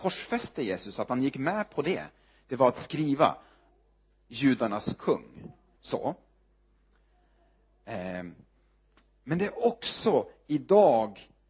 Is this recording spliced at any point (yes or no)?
yes